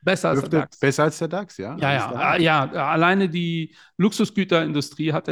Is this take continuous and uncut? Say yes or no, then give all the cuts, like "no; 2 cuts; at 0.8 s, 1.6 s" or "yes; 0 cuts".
yes; 0 cuts